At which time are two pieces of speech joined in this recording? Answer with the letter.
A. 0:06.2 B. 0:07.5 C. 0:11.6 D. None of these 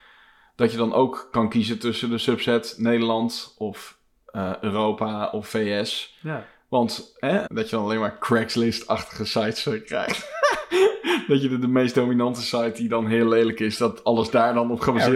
B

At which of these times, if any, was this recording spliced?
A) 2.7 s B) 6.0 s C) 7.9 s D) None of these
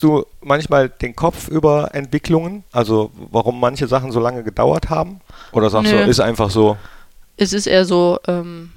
A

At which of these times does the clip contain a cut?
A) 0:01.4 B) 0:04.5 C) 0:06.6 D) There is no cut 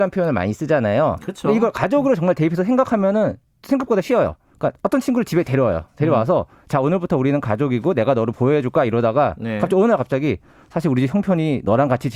D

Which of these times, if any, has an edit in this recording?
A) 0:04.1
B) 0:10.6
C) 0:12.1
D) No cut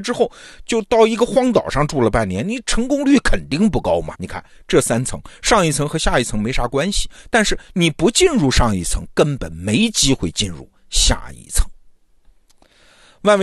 A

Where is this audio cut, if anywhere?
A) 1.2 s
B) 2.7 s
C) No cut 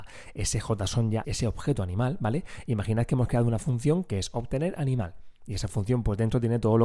A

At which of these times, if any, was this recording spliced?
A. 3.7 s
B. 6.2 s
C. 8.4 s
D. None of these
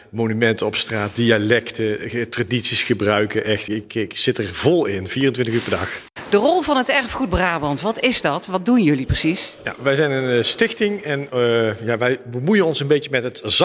A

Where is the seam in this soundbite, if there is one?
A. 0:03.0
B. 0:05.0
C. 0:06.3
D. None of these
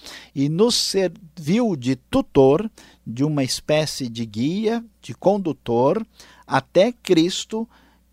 D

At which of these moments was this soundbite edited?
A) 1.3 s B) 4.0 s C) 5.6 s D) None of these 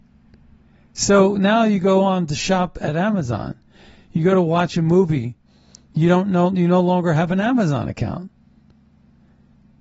D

